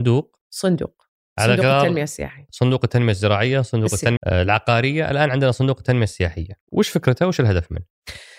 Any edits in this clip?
yes; 2 cuts; at 4.2 s, 6.6 s

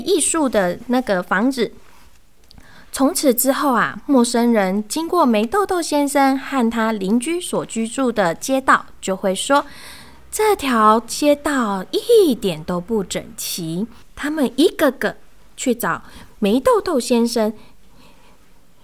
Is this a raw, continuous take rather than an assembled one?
no; 1 cut; at 14.0 s

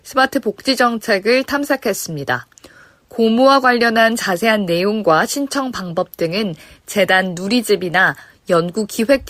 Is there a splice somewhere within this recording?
no; 0 cuts

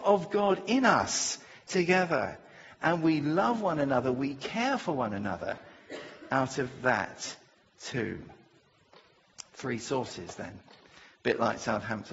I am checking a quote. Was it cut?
no; 0 cuts

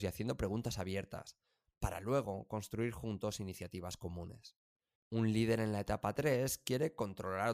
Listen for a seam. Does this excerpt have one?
yes; 1 cut; at 5.0 s

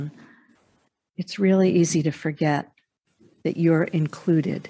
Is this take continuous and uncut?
yes; 0 cuts

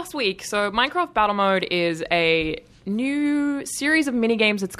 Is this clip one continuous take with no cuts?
yes; 0 cuts

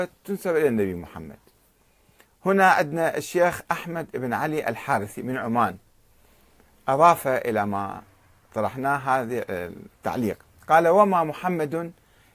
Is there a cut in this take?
yes; 1 cut; at 2.4 s

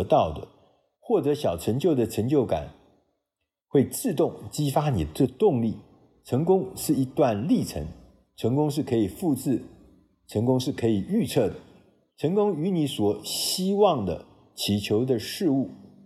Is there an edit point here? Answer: no; 0 cuts

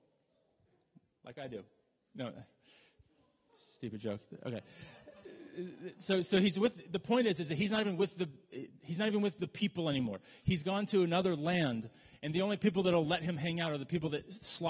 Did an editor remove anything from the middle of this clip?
no; 0 cuts

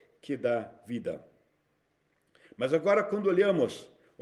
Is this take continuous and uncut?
yes; 0 cuts

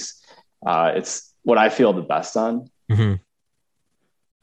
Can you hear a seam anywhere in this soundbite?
no; 0 cuts

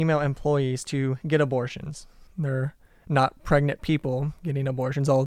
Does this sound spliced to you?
yes; 1 cut; at 2.3 s

